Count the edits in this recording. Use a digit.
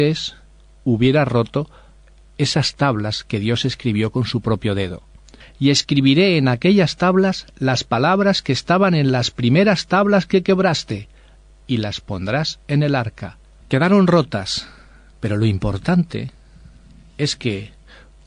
2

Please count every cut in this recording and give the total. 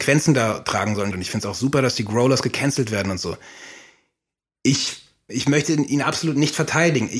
2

